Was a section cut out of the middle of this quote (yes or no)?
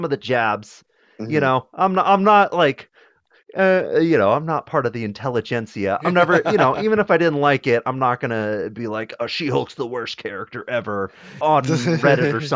yes